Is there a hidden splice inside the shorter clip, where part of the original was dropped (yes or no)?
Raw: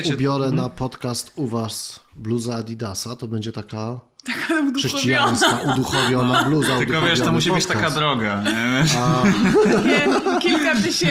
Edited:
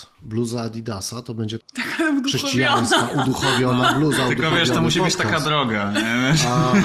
yes